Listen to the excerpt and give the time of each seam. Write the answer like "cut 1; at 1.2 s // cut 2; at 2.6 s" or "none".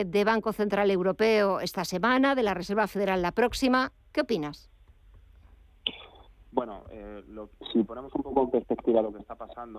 none